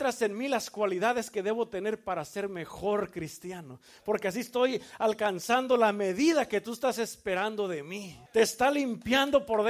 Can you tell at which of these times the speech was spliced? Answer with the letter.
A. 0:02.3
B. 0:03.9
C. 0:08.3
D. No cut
C